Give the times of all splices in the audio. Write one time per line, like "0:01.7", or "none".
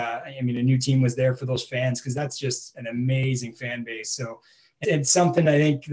0:04.8